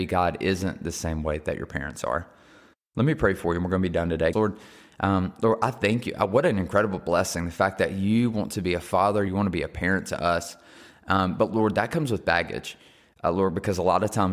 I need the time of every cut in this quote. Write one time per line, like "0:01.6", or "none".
0:04.3
0:09.3